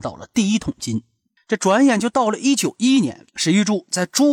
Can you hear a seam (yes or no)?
yes